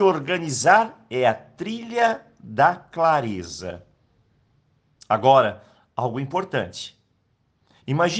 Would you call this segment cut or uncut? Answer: uncut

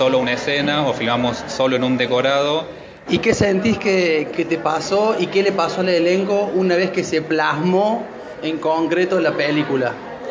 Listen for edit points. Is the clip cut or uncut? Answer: cut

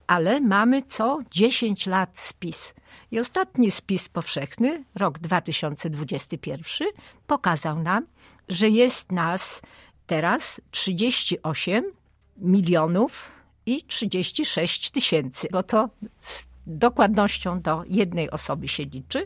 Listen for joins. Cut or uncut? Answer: cut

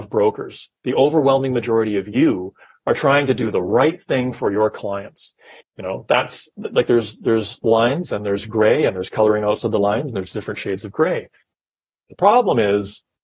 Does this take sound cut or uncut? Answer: cut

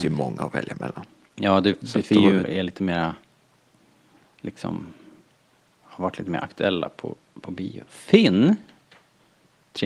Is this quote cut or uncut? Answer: cut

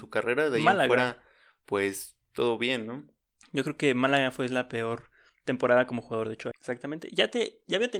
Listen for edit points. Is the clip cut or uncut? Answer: cut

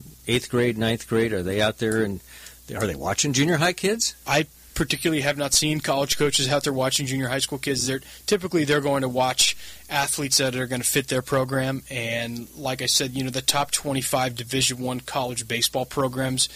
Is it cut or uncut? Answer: uncut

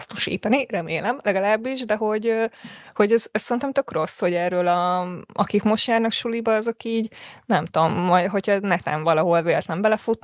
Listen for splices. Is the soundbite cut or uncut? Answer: uncut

